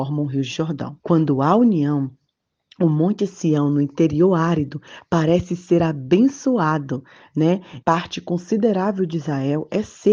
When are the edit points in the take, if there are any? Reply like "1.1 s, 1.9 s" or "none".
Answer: 1.0 s, 7.8 s